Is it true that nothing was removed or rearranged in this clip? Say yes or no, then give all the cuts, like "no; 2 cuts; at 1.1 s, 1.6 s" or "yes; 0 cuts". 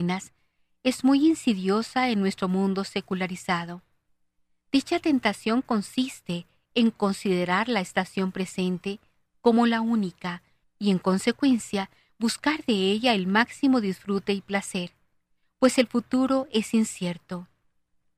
no; 1 cut; at 10.6 s